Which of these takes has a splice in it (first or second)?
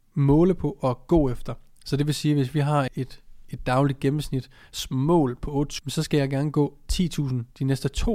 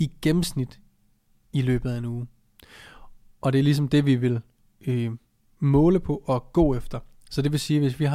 first